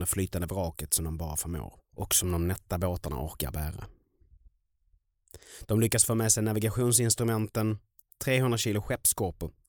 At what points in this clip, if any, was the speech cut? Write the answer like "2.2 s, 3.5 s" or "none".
8.0 s